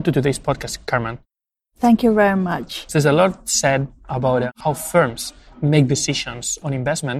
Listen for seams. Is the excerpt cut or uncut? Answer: cut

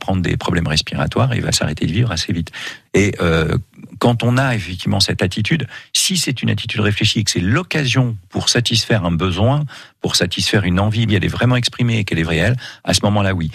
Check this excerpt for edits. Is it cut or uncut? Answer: cut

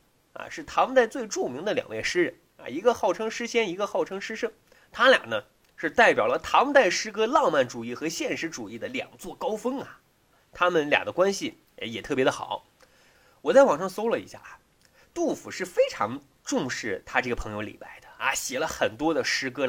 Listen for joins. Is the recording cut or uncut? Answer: uncut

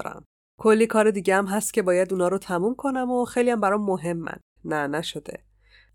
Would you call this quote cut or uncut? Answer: cut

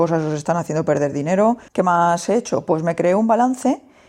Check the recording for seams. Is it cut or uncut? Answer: cut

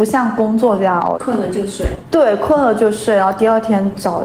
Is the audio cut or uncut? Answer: cut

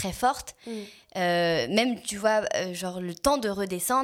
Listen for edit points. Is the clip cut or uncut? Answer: uncut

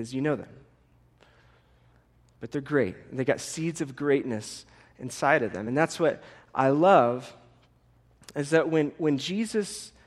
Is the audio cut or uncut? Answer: uncut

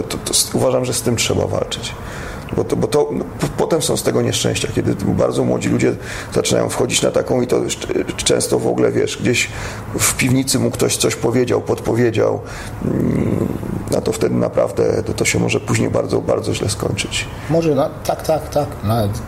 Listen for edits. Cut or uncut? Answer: uncut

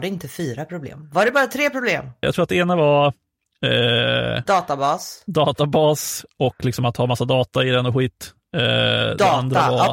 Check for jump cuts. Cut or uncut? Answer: cut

